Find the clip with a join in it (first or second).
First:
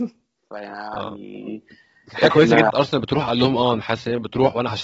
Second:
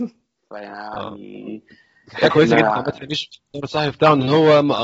first